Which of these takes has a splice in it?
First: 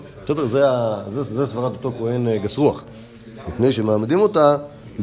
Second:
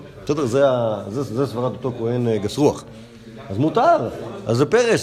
first; 1 cut; at 3.4 s

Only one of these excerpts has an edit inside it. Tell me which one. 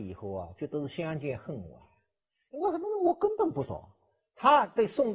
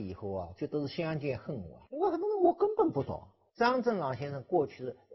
second; 2 cuts; at 1.9 s, 3.5 s

